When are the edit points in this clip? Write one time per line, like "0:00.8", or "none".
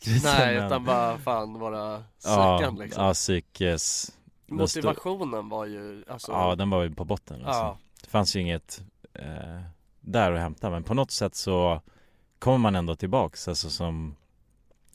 none